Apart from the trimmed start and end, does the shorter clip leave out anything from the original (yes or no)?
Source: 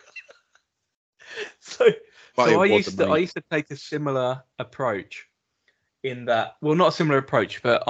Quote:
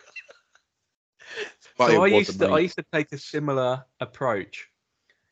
yes